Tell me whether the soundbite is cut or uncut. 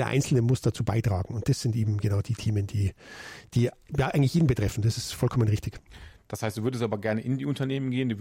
uncut